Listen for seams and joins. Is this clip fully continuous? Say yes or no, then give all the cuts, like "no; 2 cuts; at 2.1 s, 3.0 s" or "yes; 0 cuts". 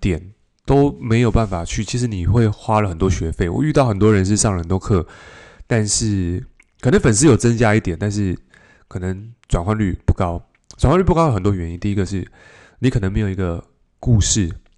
yes; 0 cuts